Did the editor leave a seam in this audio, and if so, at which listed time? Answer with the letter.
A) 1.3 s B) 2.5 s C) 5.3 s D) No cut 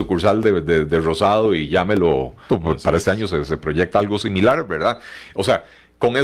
B